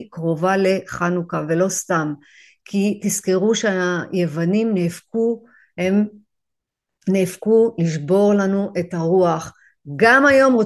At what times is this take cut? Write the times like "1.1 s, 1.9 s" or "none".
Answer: none